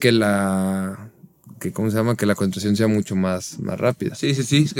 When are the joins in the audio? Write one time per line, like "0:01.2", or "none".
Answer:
none